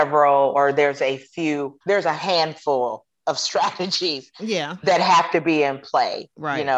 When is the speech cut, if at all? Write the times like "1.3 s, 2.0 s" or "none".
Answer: 1.8 s